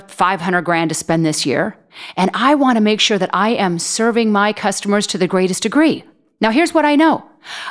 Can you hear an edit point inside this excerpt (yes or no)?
no